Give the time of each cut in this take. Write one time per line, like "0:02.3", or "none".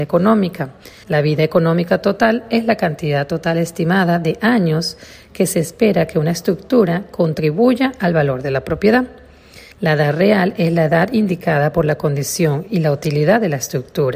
0:01.0
0:09.7